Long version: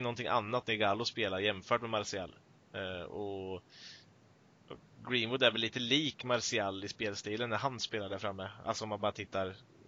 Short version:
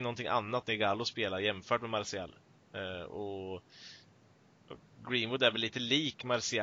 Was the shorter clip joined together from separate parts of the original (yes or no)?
no